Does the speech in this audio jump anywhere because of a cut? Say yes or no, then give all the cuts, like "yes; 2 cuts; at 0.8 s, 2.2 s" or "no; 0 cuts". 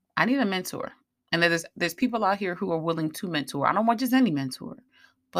no; 0 cuts